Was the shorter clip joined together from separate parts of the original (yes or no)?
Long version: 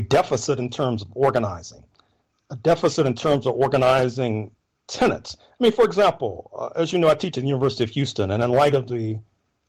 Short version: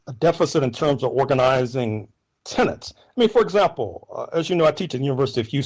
no